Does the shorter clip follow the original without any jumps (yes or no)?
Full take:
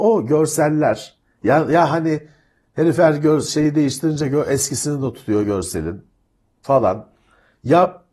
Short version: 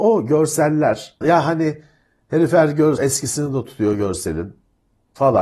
no